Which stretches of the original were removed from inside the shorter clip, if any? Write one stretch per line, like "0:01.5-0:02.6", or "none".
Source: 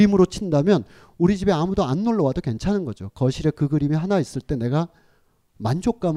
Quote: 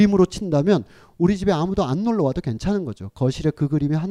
none